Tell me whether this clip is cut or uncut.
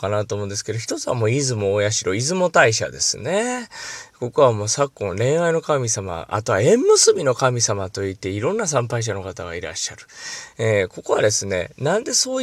uncut